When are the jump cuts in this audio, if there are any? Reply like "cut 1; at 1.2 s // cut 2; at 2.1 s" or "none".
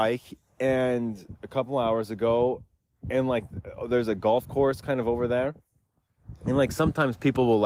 none